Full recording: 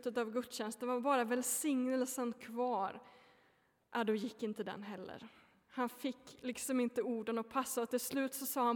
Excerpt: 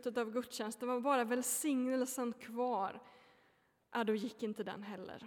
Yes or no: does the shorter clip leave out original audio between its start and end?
no